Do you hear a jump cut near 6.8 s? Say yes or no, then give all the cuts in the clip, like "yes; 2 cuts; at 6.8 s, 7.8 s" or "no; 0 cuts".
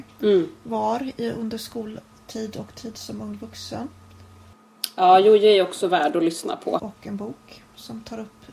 yes; 1 cut; at 6.8 s